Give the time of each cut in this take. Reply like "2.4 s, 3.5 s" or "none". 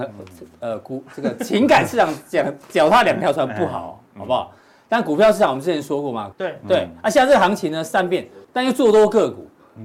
6.3 s, 8.4 s